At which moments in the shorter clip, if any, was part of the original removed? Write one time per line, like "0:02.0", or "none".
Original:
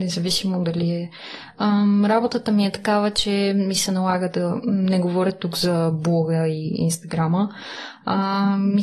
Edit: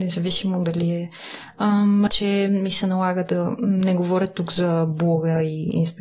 0:02.1